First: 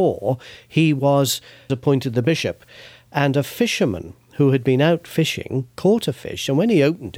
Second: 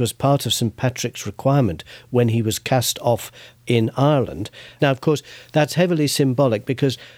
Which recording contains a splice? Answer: second; 1 cut; at 4.8 s

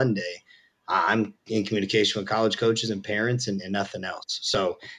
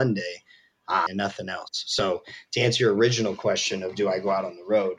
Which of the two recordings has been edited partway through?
second; 1 cut; at 1.1 s

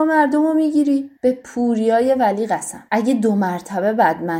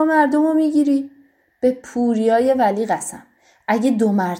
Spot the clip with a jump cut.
first; 2 cuts; at 1.2 s, 2.9 s

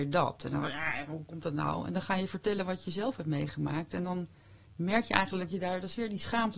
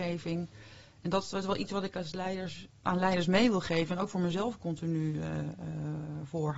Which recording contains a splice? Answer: second; 1 cut; at 2.8 s

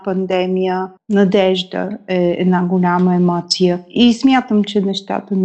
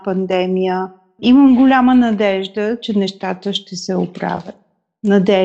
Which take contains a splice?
first; 1 cut; at 1.0 s

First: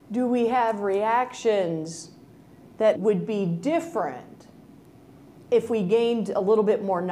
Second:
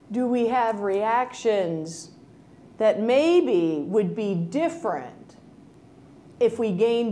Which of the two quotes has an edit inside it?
first; 1 cut; at 3.0 s

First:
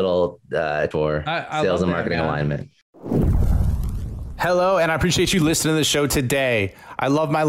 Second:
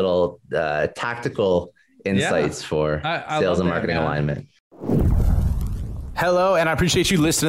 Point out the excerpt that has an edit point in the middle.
first; 1 cut; at 0.9 s

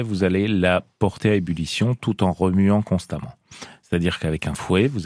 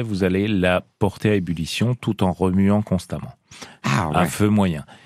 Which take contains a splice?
second; 1 cut; at 3.8 s

